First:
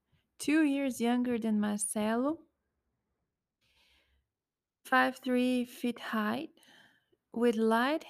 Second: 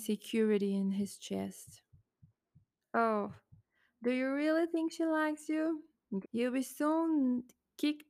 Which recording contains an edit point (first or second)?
second